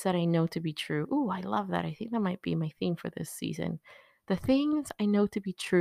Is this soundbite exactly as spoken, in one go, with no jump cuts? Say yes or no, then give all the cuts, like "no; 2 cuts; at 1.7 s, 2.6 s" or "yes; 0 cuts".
yes; 0 cuts